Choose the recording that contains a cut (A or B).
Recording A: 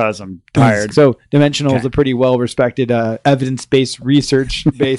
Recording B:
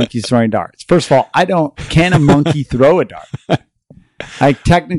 A